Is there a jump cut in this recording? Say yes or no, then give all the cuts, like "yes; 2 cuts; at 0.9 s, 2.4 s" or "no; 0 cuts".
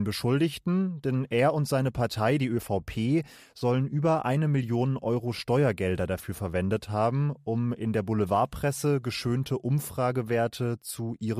no; 0 cuts